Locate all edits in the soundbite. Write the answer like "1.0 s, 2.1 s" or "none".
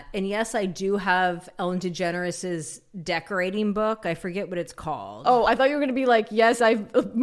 none

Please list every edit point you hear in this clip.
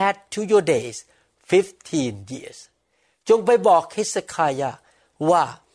none

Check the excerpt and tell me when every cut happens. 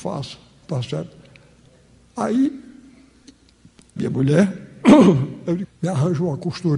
4.0 s, 5.6 s

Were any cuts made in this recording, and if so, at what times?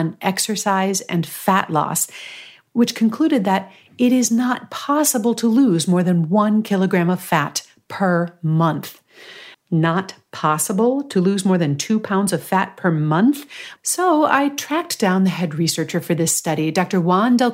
9.5 s, 13.8 s

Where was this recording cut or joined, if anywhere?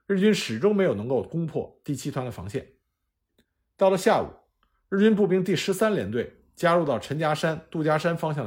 none

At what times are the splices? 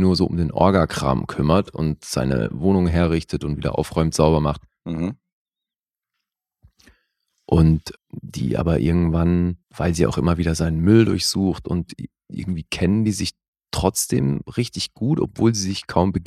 7.9 s, 9.6 s

